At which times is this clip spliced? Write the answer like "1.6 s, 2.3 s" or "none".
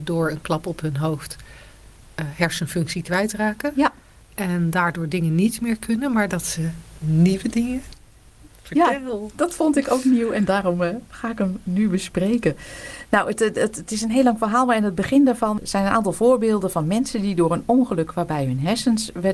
none

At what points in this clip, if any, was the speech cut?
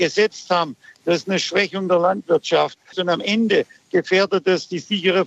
1.0 s, 2.9 s

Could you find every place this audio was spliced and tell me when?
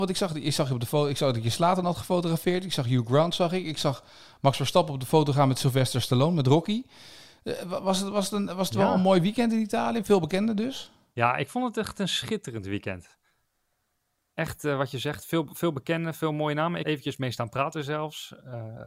16.8 s

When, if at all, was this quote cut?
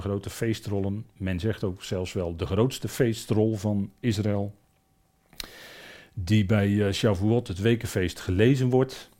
none

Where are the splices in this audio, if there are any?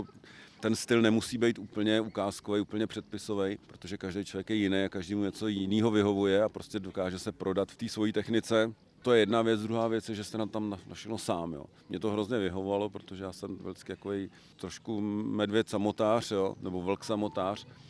3.6 s

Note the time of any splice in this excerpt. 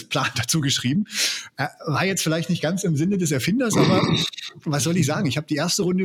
none

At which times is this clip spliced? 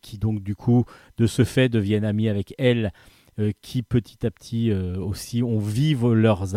none

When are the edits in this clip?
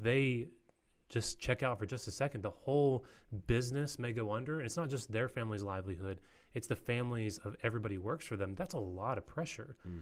none

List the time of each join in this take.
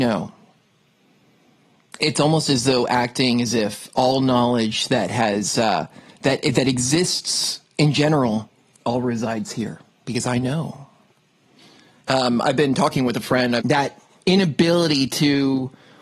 12.0 s, 13.6 s

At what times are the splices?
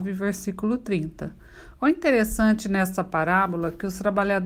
1.8 s

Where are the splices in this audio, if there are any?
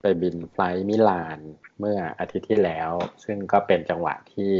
none

